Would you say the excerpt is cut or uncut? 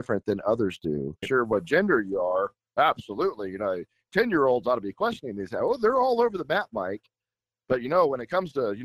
cut